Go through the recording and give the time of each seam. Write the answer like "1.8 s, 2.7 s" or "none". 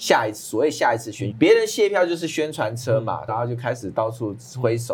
1.3 s, 3.3 s